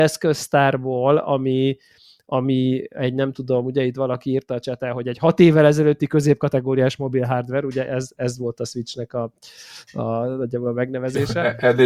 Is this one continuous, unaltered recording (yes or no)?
yes